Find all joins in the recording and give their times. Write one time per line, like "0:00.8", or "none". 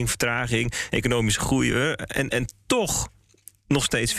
none